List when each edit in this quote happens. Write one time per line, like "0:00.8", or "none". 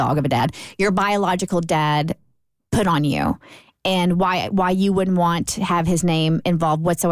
none